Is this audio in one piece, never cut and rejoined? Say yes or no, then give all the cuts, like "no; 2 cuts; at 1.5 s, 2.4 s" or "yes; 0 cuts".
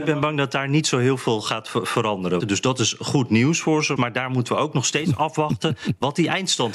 no; 2 cuts; at 2.4 s, 4.0 s